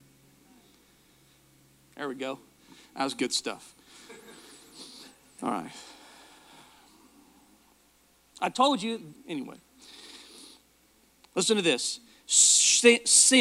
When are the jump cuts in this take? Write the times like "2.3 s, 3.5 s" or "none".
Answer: 9.1 s